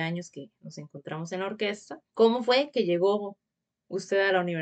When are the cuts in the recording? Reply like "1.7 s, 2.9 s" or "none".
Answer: 2.1 s